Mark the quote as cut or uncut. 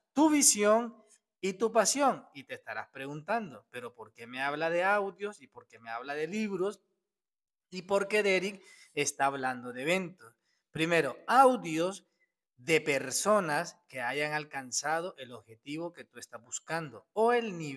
uncut